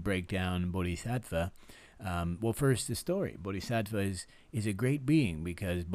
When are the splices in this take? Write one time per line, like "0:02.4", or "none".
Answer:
none

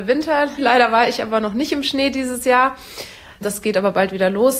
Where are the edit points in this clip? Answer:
none

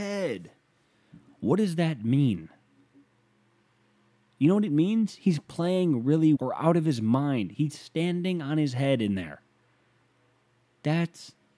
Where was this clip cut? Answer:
0:06.4

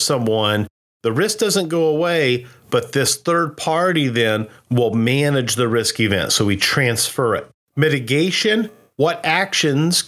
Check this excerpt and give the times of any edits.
none

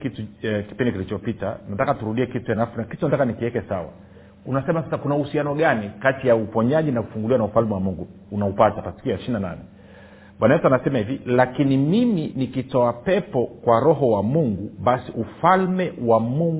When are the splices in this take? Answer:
none

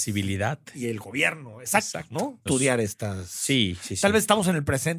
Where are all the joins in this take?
0:02.5

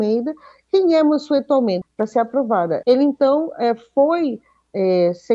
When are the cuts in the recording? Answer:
0:01.8
0:02.8

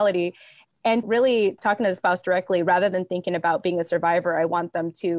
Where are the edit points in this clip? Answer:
0:01.0

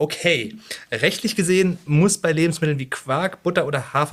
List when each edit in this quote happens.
none

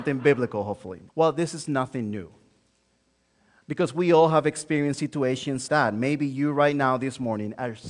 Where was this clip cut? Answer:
0:01.1
0:05.7

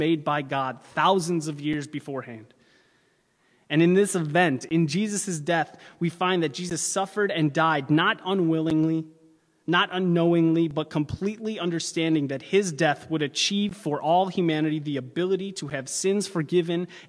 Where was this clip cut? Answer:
none

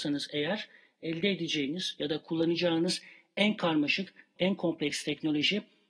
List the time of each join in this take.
0:04.4

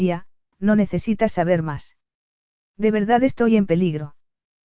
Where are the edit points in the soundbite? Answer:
none

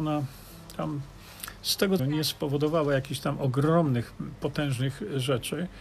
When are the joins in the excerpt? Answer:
0:02.0

